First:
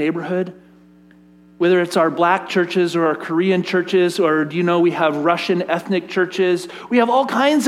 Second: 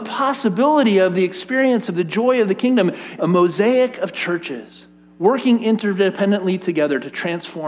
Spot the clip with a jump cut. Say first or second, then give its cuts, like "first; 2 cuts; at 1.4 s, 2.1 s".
second; 1 cut; at 3.2 s